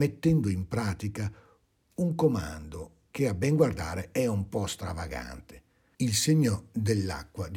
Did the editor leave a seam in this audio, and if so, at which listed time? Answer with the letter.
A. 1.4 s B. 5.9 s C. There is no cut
B